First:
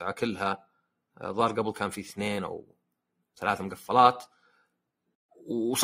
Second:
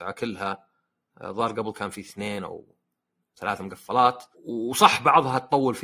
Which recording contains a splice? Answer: second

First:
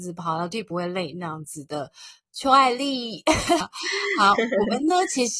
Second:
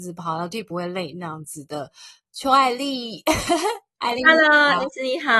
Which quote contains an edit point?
first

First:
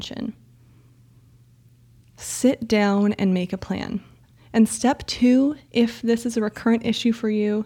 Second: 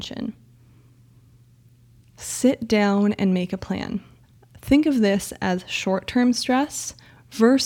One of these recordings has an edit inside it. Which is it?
first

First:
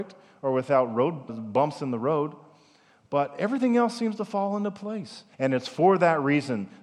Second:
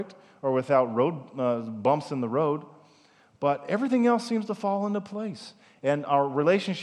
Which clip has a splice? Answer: first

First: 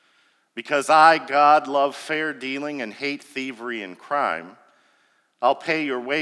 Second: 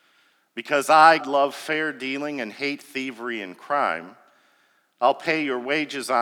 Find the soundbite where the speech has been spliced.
second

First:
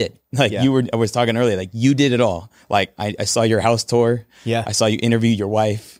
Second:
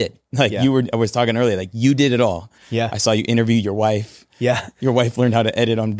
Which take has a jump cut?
second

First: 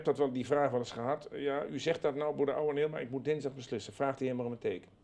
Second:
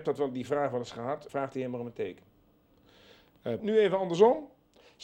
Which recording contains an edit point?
second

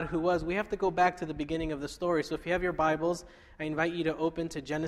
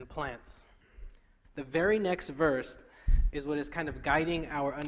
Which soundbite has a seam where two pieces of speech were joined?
second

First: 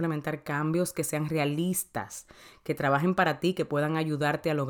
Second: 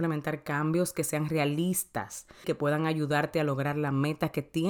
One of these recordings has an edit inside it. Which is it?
second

